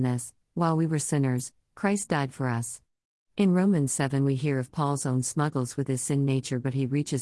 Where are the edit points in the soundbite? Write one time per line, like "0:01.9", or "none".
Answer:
0:01.0